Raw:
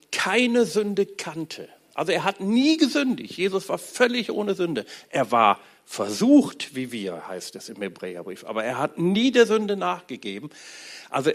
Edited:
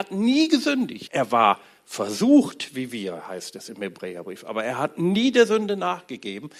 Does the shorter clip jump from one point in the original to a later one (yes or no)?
yes